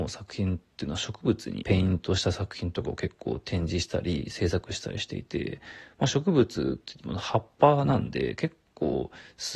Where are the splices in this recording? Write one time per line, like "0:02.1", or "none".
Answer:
none